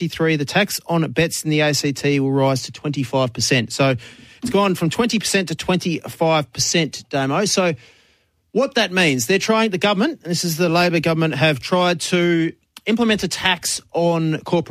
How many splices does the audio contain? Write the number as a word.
zero